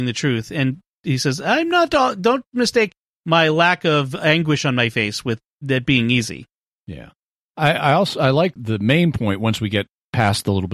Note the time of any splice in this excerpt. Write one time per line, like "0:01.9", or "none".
0:08.6